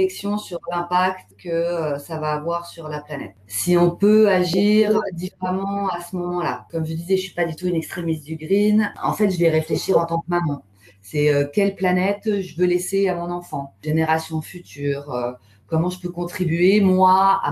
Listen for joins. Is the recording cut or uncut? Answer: uncut